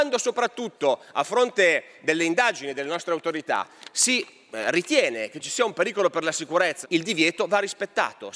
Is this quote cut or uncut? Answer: cut